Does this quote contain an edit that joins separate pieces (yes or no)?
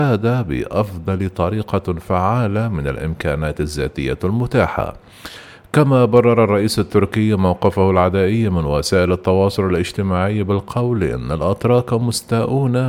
no